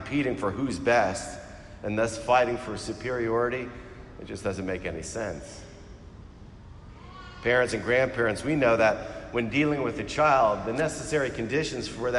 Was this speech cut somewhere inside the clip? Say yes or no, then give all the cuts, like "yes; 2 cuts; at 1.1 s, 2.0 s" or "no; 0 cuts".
no; 0 cuts